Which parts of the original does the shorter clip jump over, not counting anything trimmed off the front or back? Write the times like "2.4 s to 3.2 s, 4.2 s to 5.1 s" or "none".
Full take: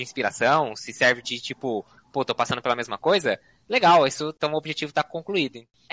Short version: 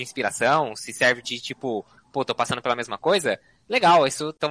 none